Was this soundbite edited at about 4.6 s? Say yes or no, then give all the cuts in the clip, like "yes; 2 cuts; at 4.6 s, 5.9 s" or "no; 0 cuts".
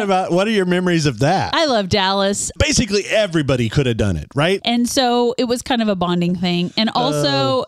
yes; 2 cuts; at 2.6 s, 4.6 s